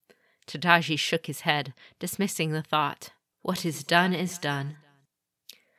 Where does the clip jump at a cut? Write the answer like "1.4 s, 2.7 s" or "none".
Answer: 3.3 s